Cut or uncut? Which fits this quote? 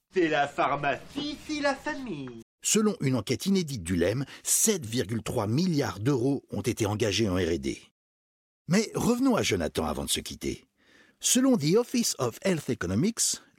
cut